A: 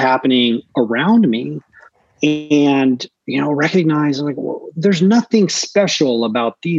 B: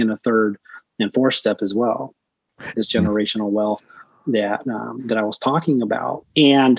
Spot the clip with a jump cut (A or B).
B